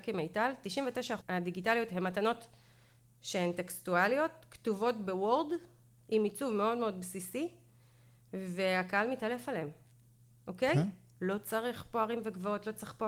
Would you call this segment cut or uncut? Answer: cut